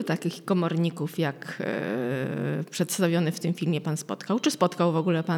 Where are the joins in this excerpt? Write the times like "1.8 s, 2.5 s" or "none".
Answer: none